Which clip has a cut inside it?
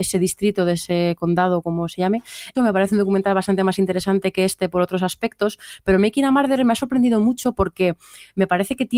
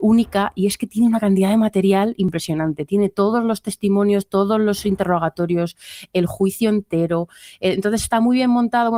first; 1 cut; at 2.5 s

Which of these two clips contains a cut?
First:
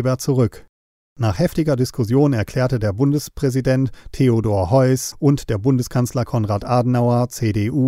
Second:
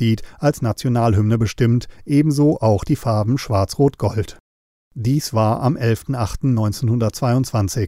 first; 2 cuts; at 1.0 s, 5.1 s

